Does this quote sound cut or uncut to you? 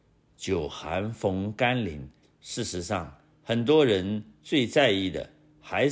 cut